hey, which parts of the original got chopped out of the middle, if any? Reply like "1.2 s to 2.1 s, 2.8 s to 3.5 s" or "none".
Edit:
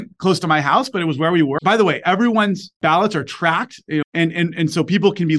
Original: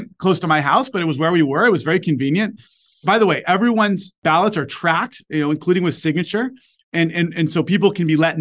1.6 s to 3.0 s, 5.4 s to 6.8 s